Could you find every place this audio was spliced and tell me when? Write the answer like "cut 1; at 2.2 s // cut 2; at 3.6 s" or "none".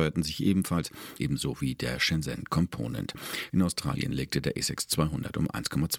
cut 1; at 1.2 s // cut 2; at 3.5 s